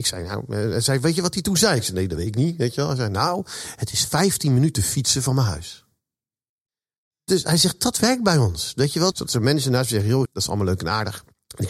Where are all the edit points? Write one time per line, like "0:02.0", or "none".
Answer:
0:09.1
0:10.3